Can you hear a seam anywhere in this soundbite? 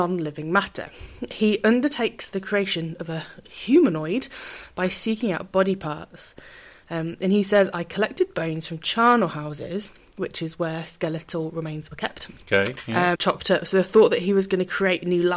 yes; 1 cut; at 13.1 s

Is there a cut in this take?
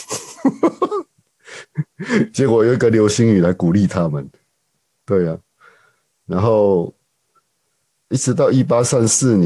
yes; 1 cut; at 8.1 s

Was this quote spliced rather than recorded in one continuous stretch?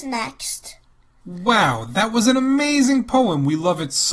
yes; 1 cut; at 1.2 s

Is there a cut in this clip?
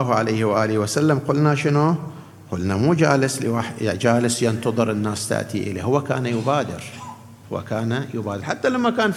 no; 0 cuts

